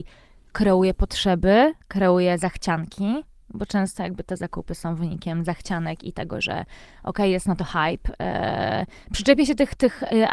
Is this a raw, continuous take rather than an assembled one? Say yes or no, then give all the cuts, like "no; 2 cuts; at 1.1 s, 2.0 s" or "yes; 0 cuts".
no; 1 cut; at 1.8 s